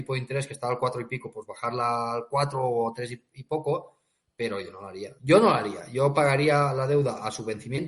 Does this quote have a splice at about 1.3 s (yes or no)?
no